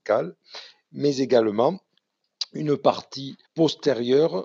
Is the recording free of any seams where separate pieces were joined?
no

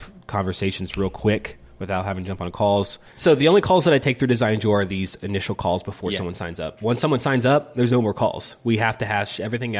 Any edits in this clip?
no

